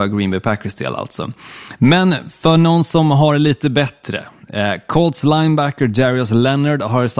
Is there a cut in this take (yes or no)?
no